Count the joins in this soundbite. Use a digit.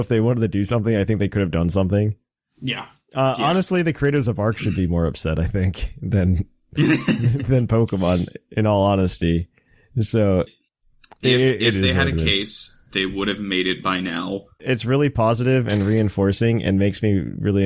2